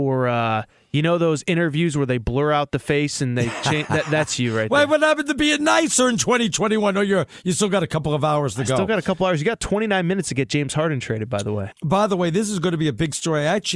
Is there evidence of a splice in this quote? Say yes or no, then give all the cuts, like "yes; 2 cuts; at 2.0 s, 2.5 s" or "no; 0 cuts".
no; 0 cuts